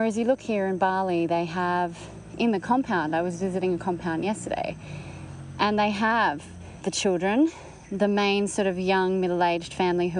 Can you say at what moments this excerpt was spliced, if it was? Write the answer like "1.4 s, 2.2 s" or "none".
none